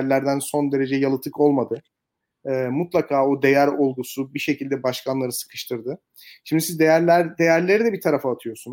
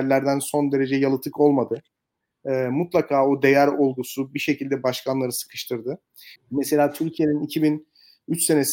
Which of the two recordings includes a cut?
second; 1 cut; at 6.4 s

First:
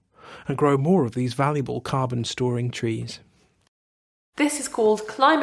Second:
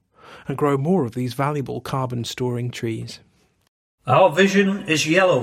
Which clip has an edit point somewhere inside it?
second; 1 cut; at 3.9 s

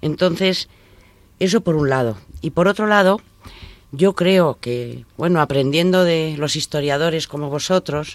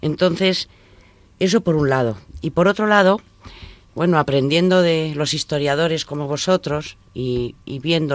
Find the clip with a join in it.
second; 1 cut; at 3.9 s

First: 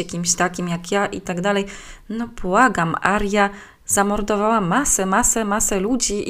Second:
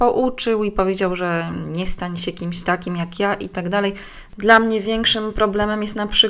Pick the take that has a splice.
second; 1 cut; at 4.3 s

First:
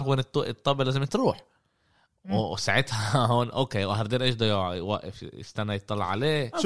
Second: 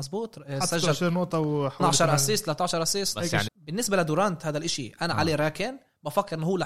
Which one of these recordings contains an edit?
second; 1 cut; at 3.5 s

